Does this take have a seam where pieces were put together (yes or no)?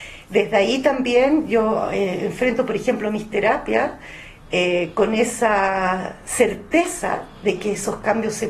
no